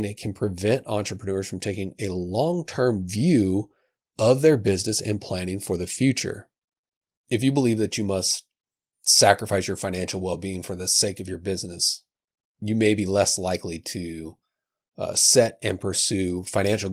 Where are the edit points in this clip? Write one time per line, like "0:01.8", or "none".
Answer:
none